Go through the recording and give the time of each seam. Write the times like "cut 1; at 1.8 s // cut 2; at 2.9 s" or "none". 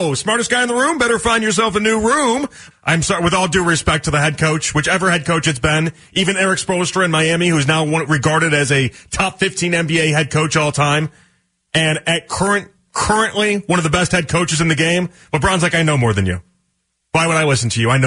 cut 1; at 2.7 s